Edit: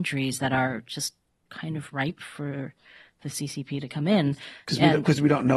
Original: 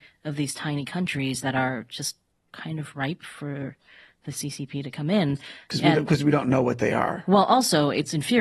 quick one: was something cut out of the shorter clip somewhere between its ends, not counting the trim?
no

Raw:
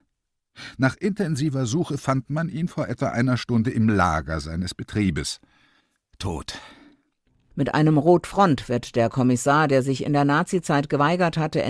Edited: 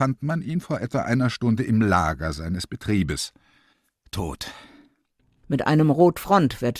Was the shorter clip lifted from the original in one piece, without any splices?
yes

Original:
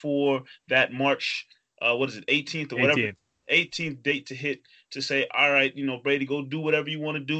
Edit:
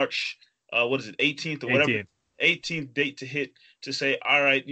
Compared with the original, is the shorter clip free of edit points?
yes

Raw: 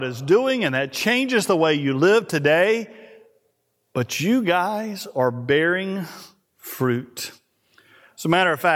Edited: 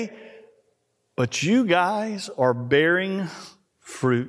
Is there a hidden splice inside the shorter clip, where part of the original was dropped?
no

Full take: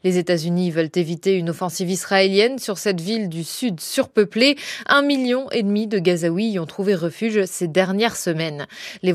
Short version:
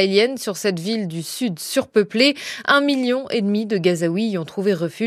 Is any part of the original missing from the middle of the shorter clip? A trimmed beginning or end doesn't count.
no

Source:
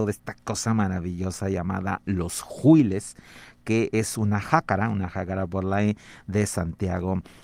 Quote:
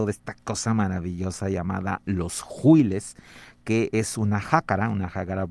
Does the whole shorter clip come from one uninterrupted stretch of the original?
yes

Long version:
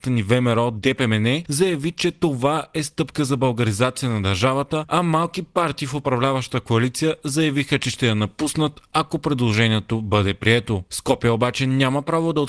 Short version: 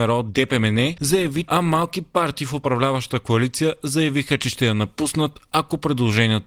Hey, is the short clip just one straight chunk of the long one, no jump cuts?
no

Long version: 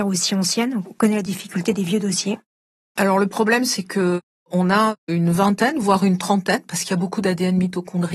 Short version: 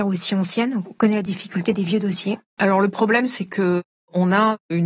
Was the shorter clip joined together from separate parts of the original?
yes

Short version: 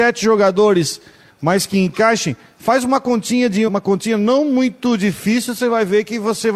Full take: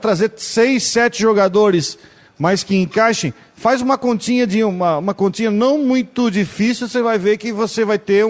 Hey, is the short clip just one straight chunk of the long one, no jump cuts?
no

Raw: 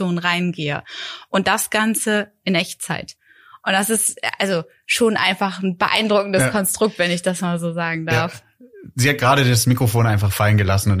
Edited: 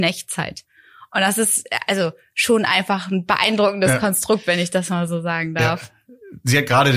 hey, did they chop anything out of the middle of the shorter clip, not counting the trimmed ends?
no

